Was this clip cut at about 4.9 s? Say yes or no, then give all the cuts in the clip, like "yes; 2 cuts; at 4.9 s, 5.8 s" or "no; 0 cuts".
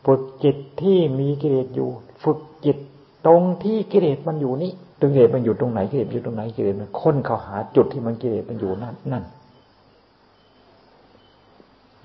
yes; 1 cut; at 4.9 s